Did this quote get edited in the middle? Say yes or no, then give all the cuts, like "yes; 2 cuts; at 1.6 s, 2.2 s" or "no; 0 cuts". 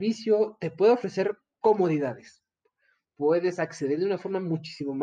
yes; 1 cut; at 3.0 s